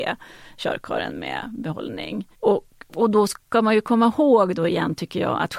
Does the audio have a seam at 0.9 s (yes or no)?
no